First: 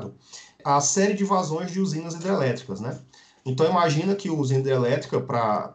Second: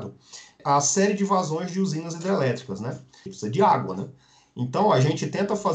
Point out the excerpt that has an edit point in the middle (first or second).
second